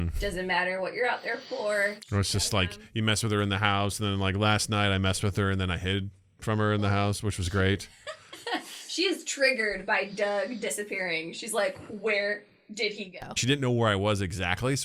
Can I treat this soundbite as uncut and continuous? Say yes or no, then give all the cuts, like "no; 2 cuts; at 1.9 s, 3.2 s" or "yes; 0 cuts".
no; 2 cuts; at 8.3 s, 13.4 s